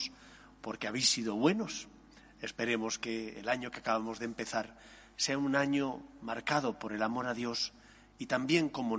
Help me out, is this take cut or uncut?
uncut